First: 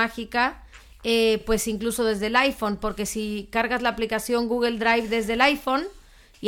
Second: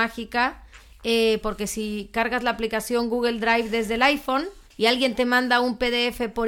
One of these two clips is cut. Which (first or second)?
second